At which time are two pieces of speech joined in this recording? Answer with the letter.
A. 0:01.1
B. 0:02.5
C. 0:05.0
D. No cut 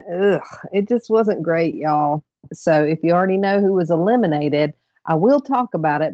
B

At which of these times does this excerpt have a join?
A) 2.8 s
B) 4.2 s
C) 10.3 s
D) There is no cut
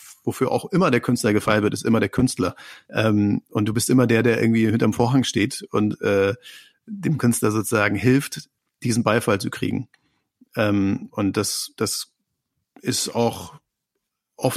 A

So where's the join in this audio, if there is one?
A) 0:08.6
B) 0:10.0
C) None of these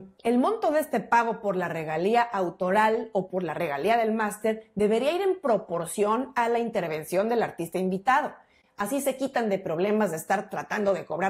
A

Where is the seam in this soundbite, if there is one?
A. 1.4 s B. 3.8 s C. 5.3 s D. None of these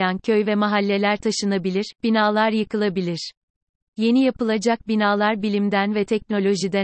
D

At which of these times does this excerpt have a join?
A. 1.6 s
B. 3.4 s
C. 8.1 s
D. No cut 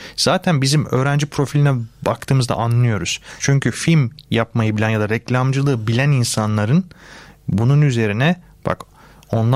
B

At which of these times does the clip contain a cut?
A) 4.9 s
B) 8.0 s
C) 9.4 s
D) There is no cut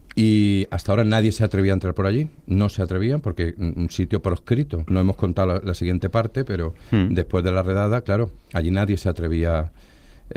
A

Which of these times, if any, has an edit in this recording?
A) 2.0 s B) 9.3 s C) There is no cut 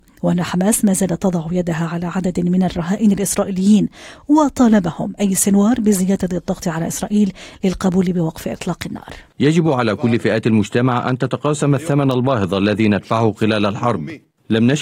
B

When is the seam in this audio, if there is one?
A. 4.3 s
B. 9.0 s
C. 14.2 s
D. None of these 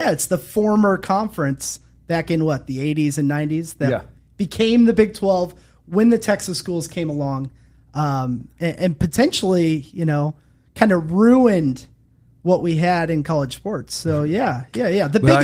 D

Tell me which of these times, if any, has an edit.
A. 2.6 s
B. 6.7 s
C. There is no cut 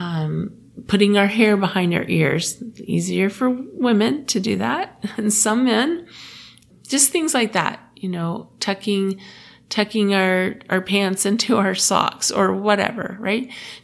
C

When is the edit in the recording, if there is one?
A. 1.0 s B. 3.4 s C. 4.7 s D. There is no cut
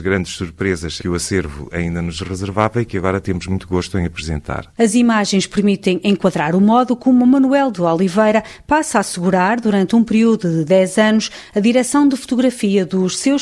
A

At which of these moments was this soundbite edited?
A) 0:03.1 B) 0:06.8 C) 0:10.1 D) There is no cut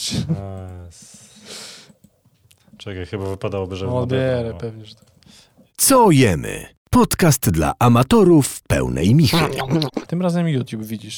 C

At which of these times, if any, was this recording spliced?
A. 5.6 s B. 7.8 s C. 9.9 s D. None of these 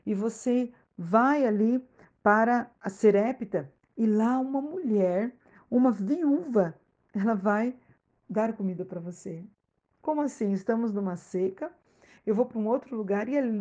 C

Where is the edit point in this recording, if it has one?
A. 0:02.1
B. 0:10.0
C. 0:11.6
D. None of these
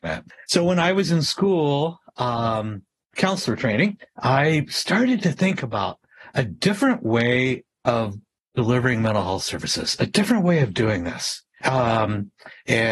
D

